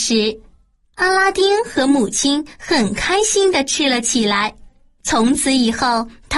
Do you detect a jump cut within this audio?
no; 0 cuts

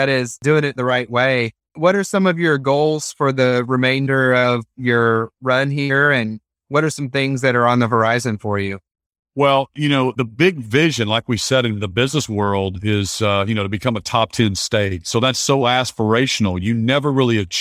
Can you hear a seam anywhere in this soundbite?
no; 0 cuts

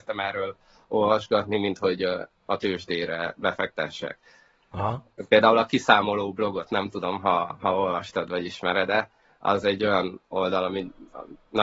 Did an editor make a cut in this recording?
no; 0 cuts

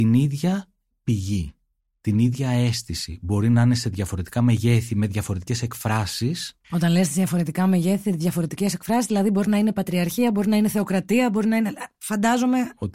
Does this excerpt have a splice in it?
no; 0 cuts

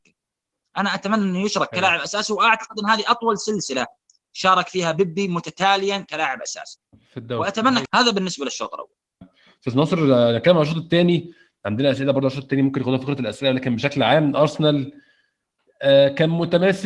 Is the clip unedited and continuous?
no; 2 cuts; at 7.9 s, 9.2 s

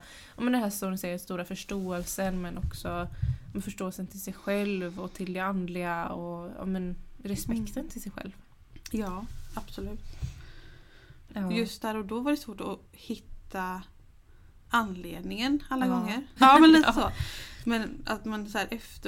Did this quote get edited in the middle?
yes; 2 cuts; at 11.3 s, 16.4 s

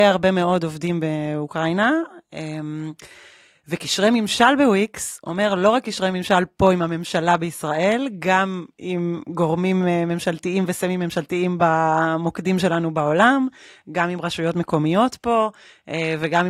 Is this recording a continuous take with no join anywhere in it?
yes; 0 cuts

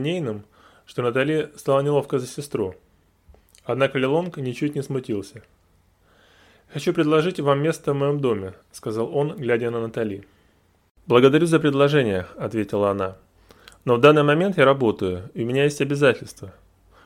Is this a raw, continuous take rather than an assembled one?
yes; 0 cuts

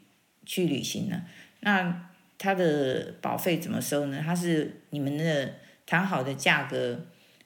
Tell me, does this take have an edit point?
no; 0 cuts

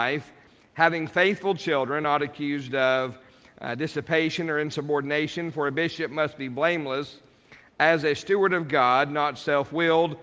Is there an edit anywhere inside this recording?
no; 0 cuts

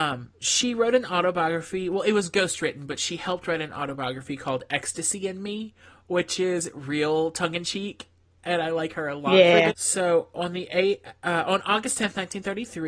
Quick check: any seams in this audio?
yes; 1 cut; at 9.7 s

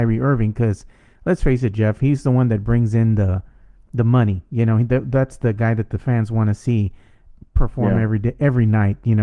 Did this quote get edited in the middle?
no; 0 cuts

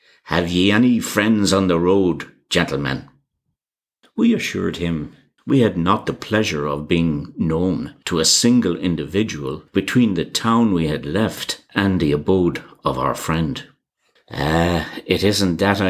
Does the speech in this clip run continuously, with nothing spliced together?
yes; 0 cuts

